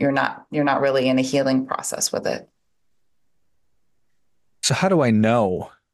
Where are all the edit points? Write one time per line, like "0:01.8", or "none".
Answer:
none